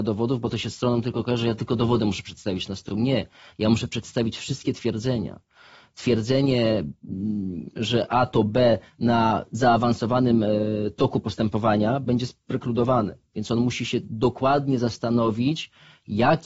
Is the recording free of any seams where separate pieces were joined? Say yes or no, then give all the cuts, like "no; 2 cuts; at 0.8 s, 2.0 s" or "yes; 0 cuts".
yes; 0 cuts